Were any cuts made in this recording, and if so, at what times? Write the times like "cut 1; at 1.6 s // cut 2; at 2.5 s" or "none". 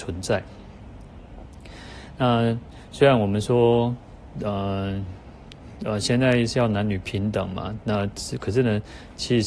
none